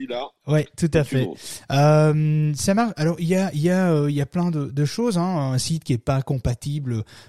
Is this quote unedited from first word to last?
yes; 0 cuts

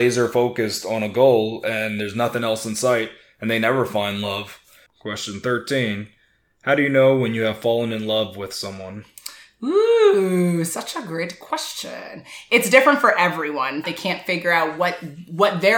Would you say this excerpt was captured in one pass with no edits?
no; 2 cuts; at 4.9 s, 13.8 s

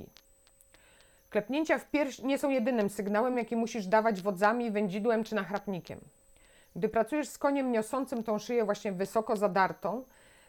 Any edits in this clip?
no; 0 cuts

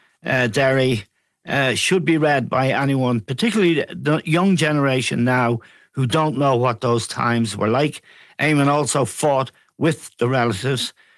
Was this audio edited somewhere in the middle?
no; 0 cuts

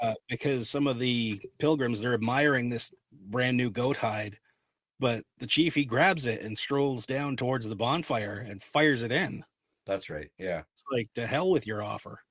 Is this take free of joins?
yes; 0 cuts

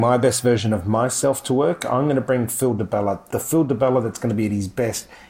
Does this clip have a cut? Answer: yes; 1 cut; at 3.3 s

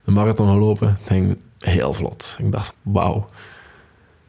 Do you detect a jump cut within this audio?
yes; 1 cut; at 2.7 s

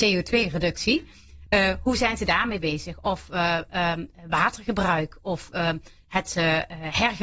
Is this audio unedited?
yes; 0 cuts

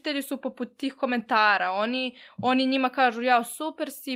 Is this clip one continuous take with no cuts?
yes; 0 cuts

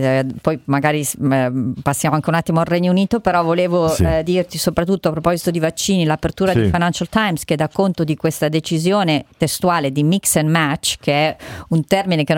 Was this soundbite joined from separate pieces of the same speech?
no; 0 cuts

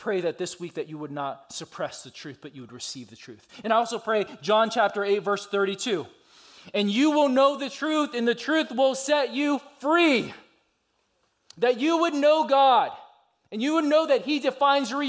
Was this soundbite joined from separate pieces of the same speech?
no; 0 cuts

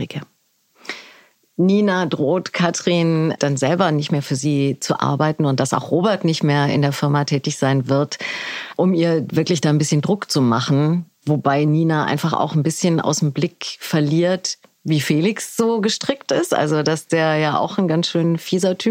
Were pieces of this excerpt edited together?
no; 0 cuts

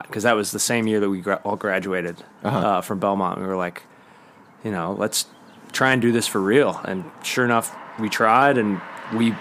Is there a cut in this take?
no; 0 cuts

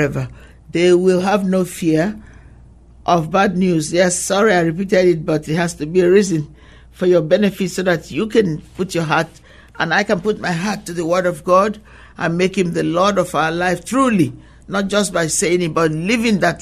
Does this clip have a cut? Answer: no; 0 cuts

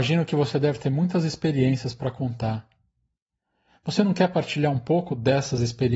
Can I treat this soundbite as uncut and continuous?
yes; 0 cuts

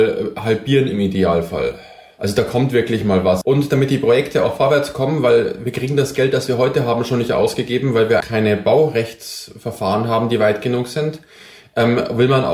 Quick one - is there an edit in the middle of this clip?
yes; 2 cuts; at 3.4 s, 8.2 s

